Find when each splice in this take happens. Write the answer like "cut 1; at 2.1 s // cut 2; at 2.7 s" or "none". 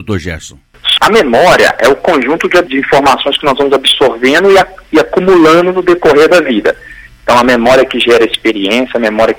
cut 1; at 1.0 s